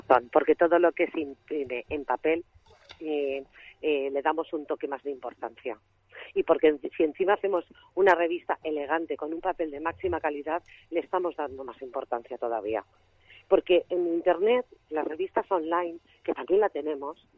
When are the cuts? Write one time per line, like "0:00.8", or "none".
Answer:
none